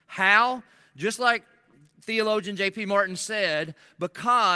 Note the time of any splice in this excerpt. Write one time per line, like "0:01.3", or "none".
none